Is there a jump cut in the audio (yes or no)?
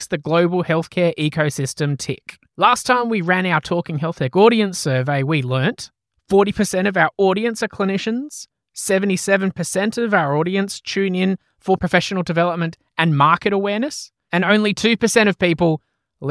yes